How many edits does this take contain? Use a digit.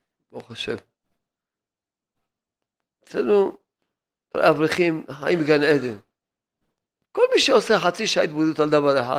1